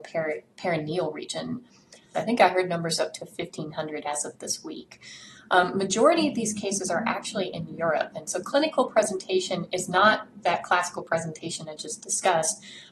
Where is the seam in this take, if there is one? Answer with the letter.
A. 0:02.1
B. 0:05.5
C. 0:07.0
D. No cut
A